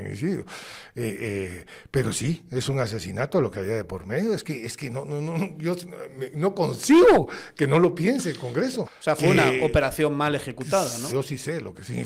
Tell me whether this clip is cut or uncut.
cut